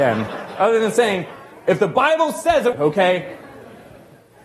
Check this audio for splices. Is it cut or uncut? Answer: cut